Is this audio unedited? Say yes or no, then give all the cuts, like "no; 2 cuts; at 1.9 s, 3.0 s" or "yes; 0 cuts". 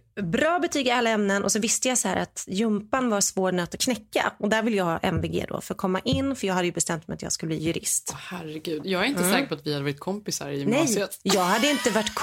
yes; 0 cuts